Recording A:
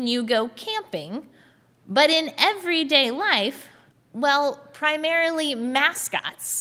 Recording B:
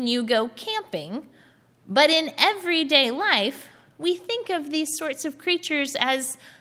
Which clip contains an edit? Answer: A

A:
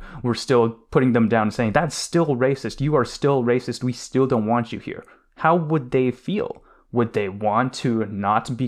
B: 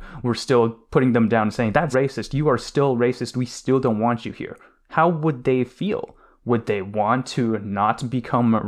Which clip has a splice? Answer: B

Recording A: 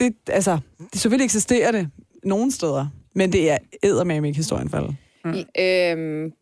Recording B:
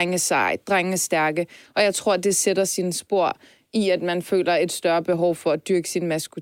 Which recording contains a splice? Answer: A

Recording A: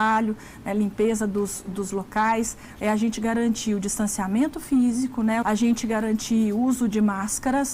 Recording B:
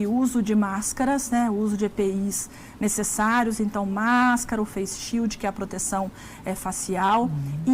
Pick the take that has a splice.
A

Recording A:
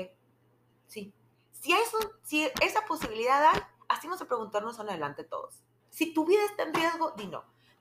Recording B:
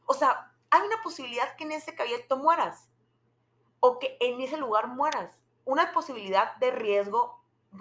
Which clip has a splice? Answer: A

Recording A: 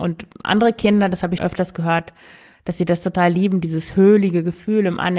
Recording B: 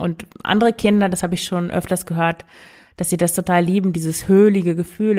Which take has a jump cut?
A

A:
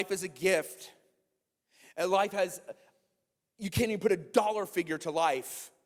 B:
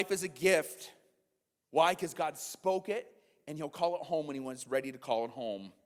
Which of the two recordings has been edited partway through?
B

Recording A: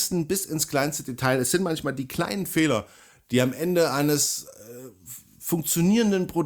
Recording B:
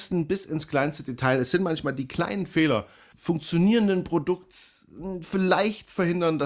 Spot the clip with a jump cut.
B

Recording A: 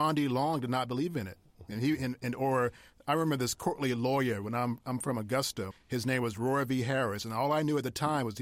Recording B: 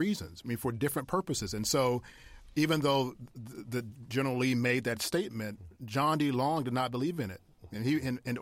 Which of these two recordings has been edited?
A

